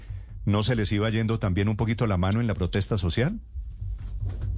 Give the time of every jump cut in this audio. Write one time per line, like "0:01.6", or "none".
none